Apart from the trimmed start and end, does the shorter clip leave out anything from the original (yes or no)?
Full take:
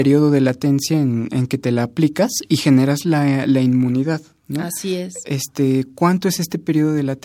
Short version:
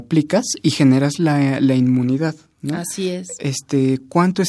no